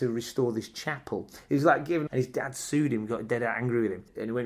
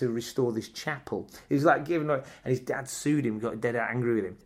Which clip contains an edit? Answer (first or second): first